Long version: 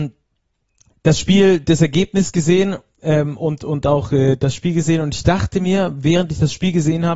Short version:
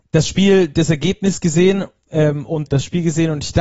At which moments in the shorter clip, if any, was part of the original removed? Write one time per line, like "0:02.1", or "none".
0:02.7